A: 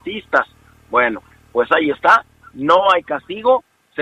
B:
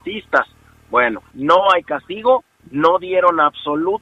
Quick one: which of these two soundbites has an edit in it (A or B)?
B